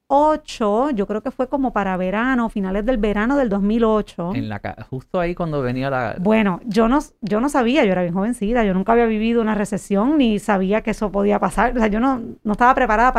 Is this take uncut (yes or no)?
yes